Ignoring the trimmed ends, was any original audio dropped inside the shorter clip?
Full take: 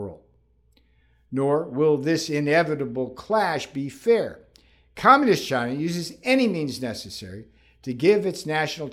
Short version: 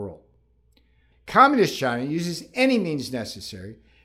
yes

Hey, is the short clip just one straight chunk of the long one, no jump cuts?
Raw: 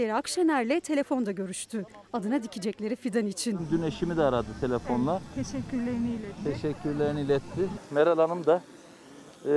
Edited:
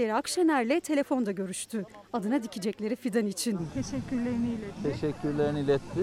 no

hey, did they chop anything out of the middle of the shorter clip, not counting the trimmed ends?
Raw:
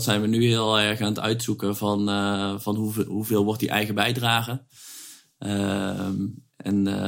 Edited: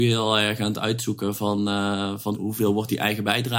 yes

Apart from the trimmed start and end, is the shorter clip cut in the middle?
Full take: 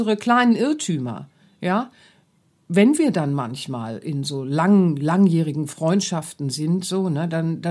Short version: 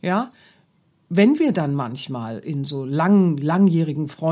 no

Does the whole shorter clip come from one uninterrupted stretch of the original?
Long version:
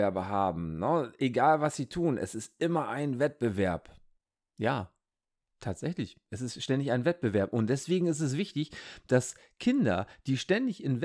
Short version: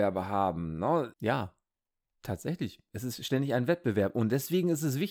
no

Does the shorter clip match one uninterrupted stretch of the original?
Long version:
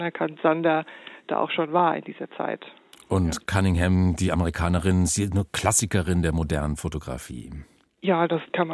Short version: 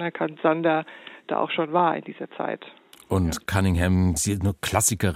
no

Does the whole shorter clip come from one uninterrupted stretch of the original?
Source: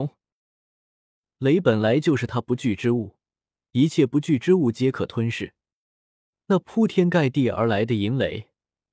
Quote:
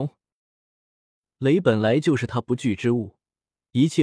yes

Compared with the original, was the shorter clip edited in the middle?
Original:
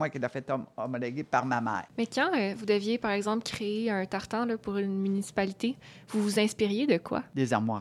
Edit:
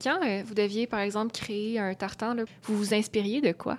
yes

